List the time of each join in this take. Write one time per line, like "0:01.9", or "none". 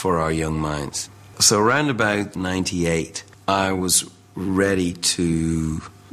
none